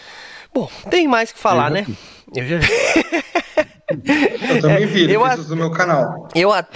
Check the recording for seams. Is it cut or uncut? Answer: uncut